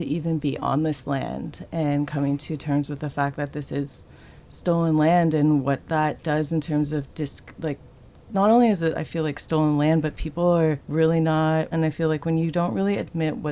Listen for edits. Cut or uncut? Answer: cut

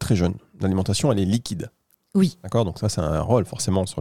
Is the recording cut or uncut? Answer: uncut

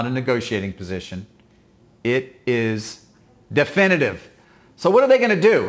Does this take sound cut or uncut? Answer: uncut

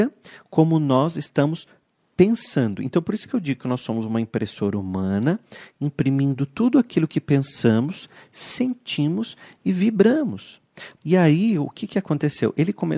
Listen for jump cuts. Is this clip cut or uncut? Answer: cut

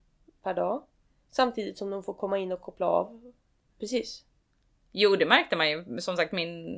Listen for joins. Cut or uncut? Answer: cut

